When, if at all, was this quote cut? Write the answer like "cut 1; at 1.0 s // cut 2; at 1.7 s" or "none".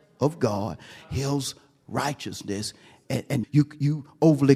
cut 1; at 3.4 s